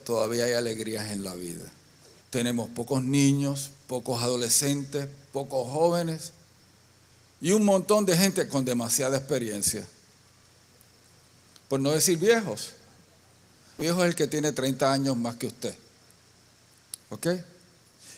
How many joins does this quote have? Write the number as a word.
two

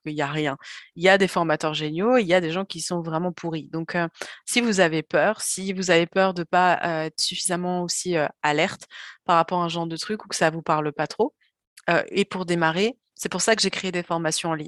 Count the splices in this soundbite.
zero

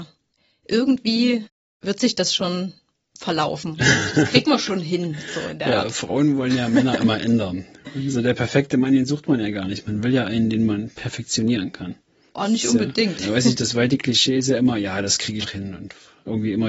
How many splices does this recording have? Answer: two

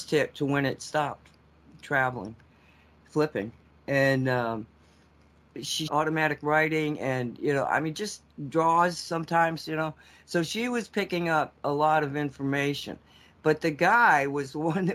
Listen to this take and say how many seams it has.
one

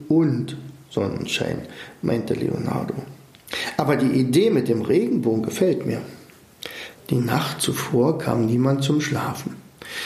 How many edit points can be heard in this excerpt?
one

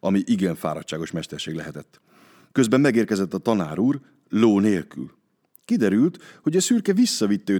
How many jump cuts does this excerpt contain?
zero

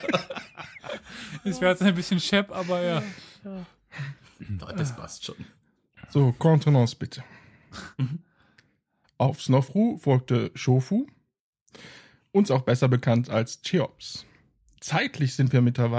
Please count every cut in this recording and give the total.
one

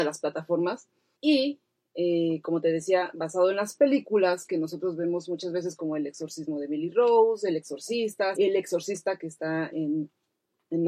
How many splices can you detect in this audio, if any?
three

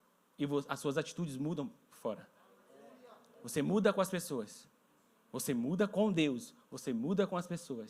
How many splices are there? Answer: zero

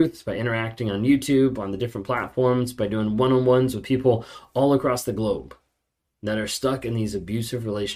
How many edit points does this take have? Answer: zero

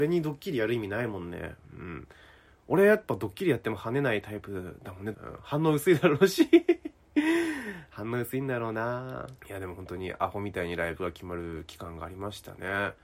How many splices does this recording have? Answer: two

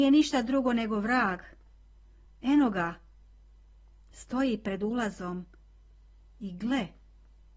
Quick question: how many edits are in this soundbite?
one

